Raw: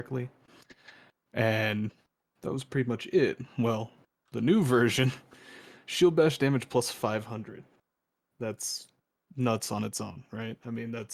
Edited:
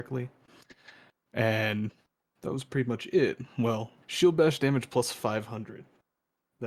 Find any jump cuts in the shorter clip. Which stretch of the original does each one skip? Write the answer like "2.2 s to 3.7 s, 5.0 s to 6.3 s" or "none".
4.0 s to 5.8 s